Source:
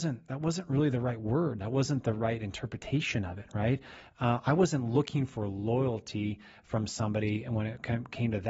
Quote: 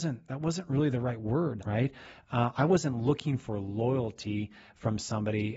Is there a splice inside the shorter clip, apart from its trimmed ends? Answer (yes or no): yes